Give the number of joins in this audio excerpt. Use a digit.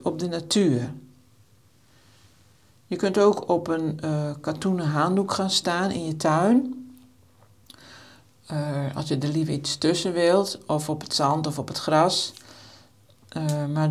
0